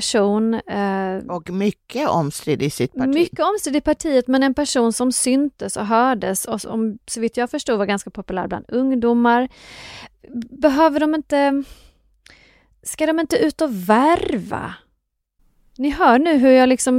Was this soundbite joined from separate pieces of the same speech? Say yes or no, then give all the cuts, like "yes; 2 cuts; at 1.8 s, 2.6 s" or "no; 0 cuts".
no; 0 cuts